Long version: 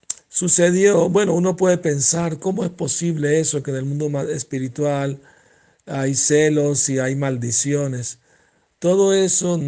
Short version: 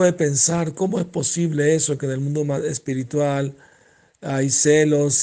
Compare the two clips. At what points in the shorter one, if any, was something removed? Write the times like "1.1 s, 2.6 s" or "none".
none